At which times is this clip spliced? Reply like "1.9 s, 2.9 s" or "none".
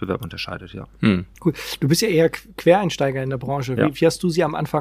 1.3 s

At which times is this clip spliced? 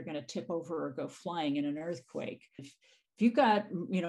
2.6 s

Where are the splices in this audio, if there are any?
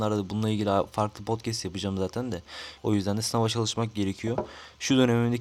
2.8 s

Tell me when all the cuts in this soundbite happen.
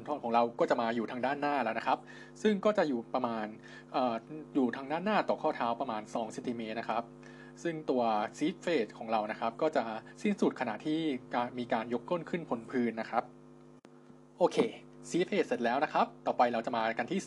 none

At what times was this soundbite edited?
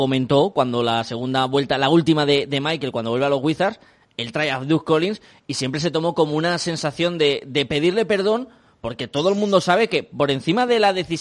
none

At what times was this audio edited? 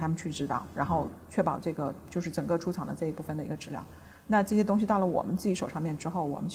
none

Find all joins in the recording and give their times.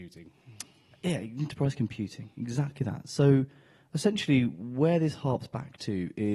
none

